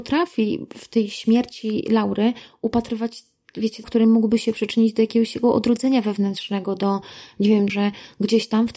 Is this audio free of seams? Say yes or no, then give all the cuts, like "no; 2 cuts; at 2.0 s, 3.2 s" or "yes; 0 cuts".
no; 2 cuts; at 3.8 s, 7.7 s